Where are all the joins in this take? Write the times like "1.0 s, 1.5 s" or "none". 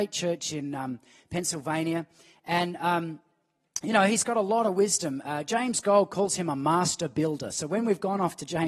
none

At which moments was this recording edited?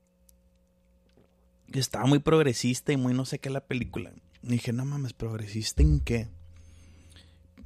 none

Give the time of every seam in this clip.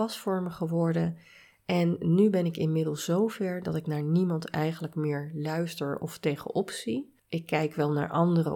7.2 s

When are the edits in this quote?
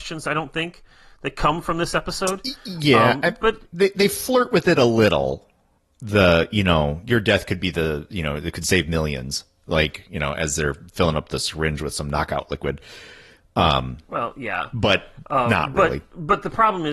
none

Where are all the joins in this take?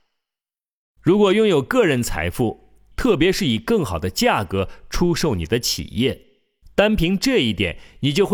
2.9 s, 6.6 s

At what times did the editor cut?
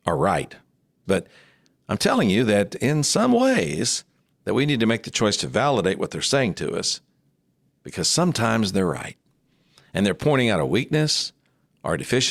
1.1 s, 4.3 s

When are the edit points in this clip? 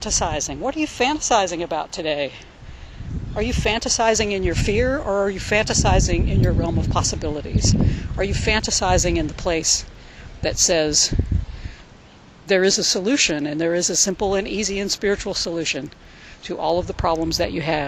none

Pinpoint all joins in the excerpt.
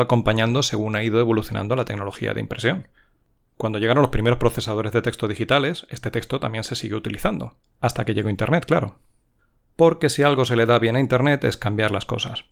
7.6 s

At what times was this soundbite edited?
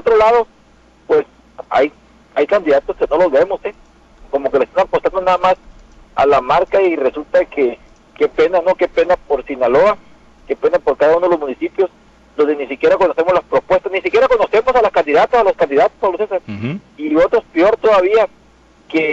none

